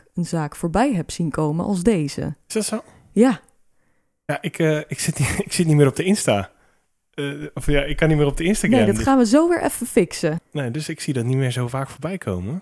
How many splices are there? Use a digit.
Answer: 1